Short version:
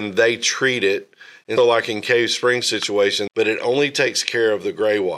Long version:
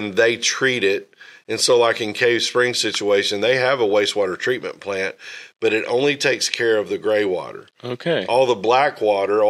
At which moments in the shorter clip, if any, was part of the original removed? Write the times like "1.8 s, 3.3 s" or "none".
1.6 s, 3.3 s